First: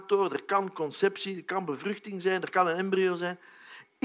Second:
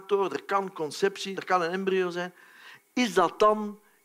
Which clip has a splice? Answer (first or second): second